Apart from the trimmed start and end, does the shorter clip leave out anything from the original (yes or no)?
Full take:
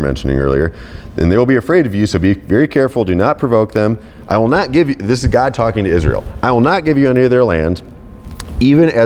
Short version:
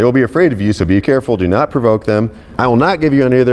yes